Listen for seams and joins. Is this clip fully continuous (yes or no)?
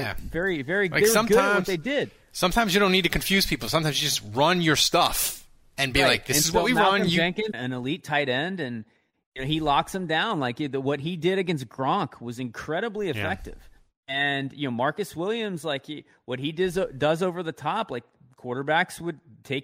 no